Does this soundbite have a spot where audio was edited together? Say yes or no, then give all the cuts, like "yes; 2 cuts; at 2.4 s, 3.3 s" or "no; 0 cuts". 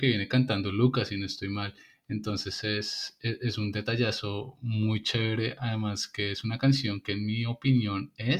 no; 0 cuts